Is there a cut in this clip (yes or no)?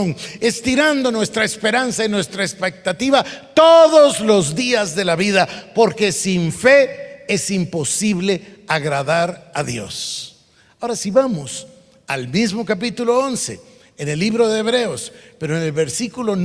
no